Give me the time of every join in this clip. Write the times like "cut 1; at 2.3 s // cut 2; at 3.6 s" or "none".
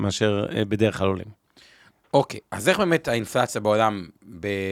none